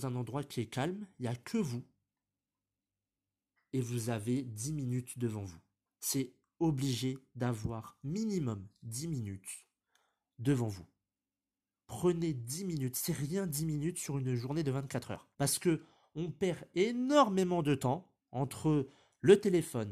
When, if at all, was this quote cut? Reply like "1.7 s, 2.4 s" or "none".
15.3 s, 18.2 s